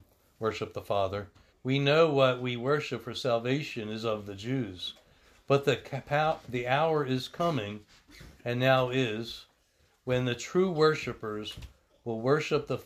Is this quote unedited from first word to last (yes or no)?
no